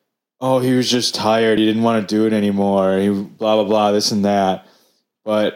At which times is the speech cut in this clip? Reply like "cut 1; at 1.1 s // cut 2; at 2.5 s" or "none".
none